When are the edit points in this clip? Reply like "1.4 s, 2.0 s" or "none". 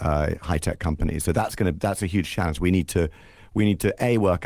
none

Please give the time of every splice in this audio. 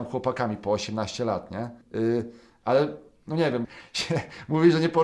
1.8 s, 3.6 s

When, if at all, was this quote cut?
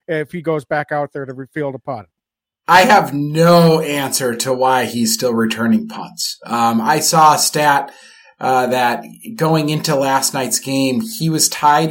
none

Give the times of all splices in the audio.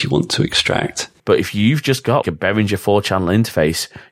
1.2 s, 2.2 s

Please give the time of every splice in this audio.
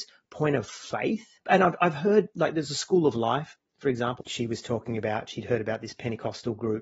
1.4 s, 4.2 s

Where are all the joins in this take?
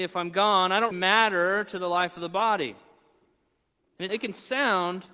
0.9 s, 4.1 s

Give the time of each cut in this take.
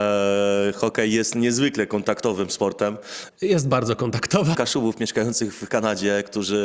3.3 s, 4.5 s

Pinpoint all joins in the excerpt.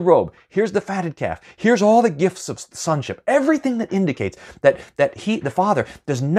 none

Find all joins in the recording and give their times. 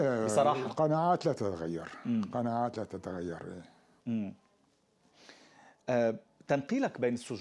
none

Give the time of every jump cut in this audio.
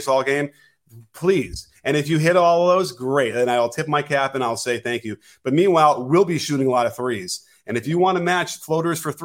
none

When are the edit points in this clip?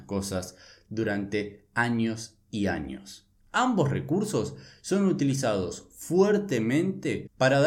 3.4 s

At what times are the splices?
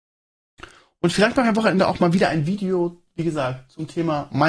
none

